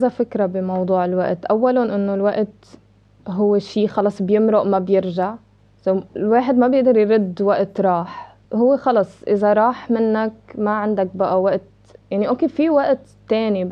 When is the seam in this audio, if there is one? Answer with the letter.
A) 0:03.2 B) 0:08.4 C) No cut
B